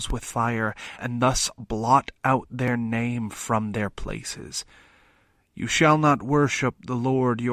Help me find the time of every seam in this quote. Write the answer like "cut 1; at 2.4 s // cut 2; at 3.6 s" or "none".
cut 1; at 1.0 s